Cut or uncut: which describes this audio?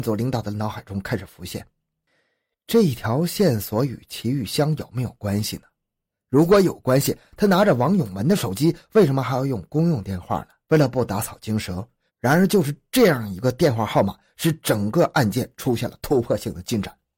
cut